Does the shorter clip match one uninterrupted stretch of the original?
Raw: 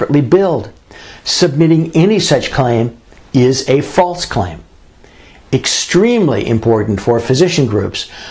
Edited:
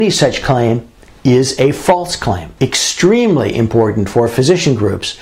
no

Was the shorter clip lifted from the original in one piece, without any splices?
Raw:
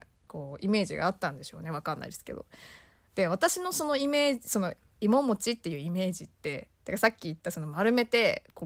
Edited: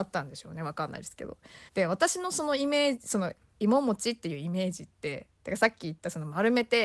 no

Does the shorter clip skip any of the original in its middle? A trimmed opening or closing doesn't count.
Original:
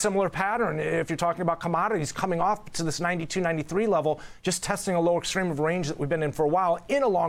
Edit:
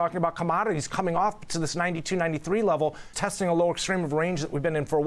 yes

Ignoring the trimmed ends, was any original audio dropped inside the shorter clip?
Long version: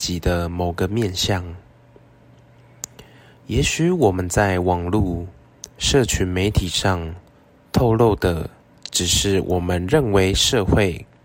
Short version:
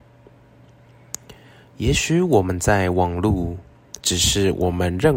yes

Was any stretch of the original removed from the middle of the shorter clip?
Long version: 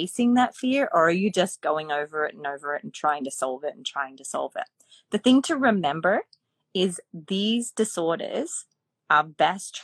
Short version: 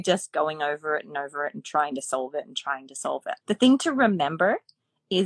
yes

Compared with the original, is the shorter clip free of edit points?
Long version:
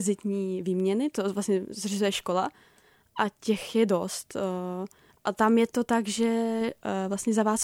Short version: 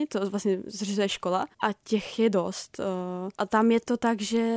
no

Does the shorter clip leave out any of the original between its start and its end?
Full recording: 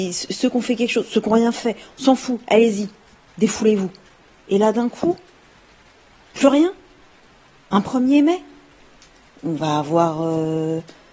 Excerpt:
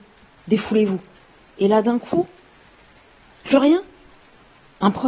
no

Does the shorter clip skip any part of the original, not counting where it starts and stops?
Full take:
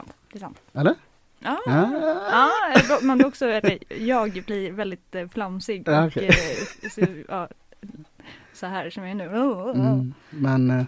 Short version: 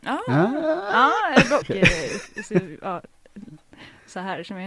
yes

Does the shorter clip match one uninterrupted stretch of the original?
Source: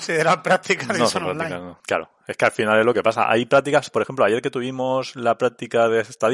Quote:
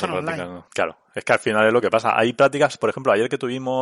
yes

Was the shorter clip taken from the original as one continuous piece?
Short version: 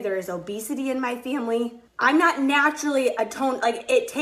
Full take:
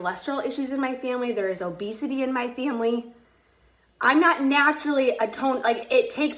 no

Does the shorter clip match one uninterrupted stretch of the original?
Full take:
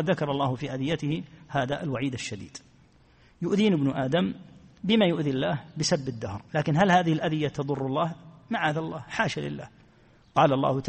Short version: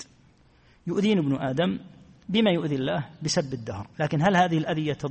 yes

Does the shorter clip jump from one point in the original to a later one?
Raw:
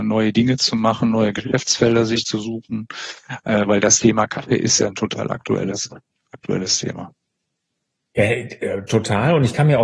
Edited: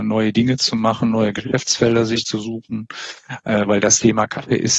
no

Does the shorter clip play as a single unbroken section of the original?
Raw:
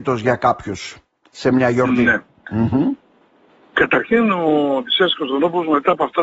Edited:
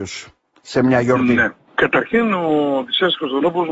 no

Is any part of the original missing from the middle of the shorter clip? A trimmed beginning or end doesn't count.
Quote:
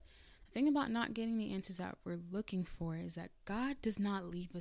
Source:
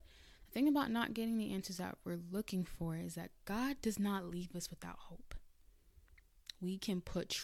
no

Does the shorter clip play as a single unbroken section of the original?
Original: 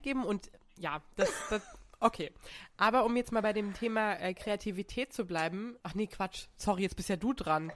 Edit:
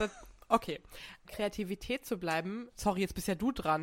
no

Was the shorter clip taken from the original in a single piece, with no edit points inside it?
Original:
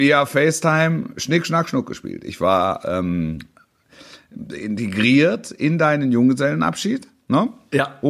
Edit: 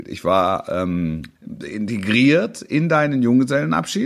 no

